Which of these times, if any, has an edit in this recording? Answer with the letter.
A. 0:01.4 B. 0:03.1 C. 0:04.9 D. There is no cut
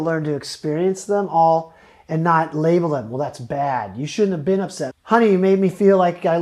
C